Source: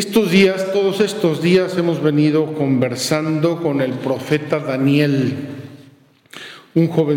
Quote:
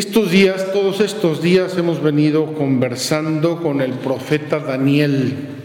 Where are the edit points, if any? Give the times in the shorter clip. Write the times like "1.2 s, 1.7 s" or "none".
none